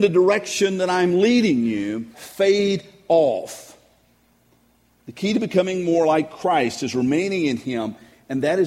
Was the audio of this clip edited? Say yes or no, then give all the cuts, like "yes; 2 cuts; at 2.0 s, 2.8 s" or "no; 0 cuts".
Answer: yes; 1 cut; at 2.1 s